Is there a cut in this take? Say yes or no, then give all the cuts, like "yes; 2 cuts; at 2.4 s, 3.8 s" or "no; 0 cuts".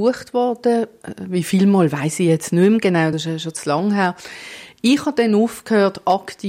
no; 0 cuts